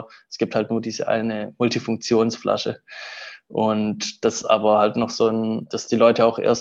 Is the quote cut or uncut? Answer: uncut